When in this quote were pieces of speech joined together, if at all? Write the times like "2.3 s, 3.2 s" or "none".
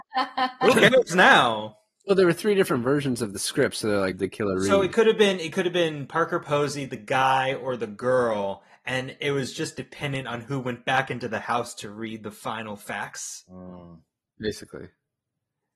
4.1 s, 14.2 s